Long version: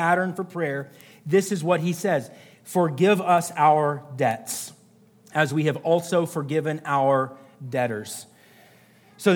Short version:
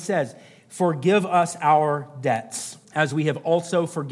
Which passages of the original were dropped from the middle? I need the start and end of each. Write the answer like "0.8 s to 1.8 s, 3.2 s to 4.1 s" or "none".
4.8 s to 5.2 s